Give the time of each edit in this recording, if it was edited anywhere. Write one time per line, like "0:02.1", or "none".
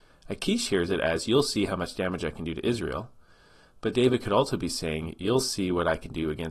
none